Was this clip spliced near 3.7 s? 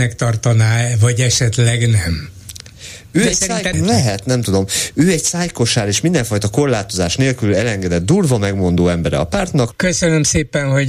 yes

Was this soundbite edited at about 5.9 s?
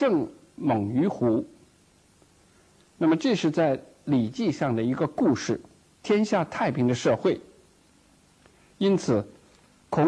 yes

